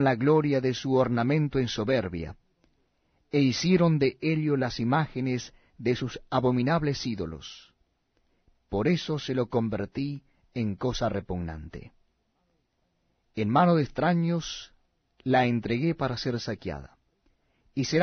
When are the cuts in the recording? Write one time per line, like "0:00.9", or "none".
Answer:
none

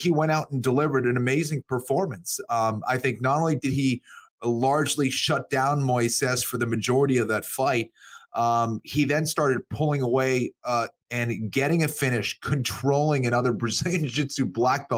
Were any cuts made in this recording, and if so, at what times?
0:11.0

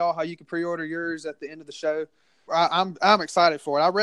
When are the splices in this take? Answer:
0:02.5

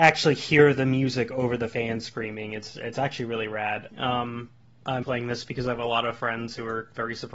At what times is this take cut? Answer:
0:03.9
0:05.0

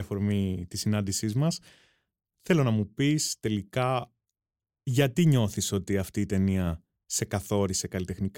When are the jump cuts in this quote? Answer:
none

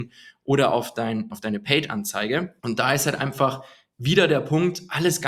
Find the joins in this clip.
0:01.3
0:02.6

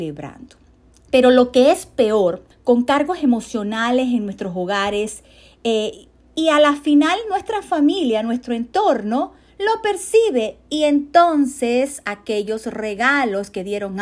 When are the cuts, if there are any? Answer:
0:01.1
0:02.5

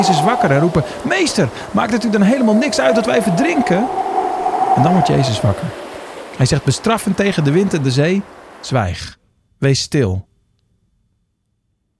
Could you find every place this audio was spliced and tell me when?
none

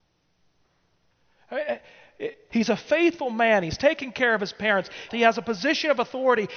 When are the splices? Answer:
0:02.5
0:05.1

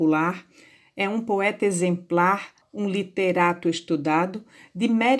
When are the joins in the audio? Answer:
0:02.6

